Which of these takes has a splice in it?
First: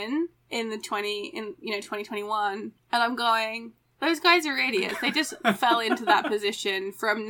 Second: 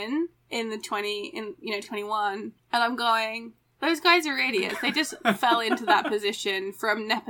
second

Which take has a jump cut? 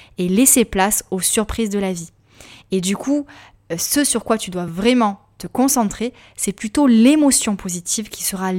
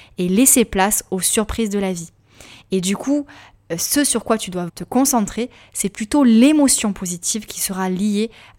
second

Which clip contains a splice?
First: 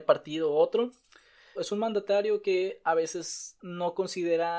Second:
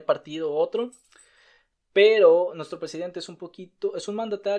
first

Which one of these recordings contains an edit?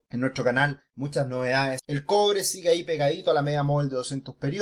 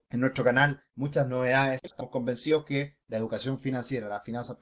first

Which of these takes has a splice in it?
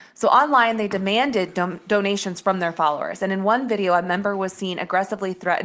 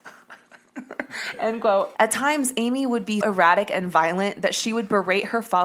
second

